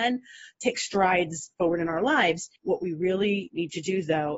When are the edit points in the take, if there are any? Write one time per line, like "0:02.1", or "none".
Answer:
0:02.6